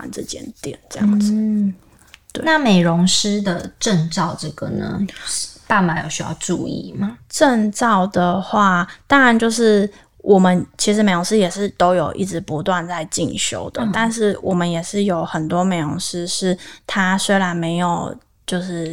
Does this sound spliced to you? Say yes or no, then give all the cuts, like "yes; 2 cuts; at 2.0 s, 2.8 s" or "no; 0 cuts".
no; 0 cuts